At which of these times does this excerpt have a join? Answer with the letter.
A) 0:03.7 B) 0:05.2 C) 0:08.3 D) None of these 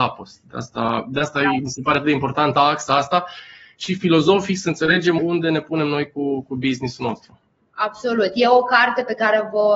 B